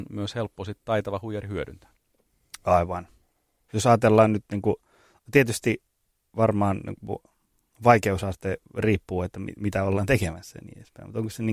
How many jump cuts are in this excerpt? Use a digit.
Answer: 1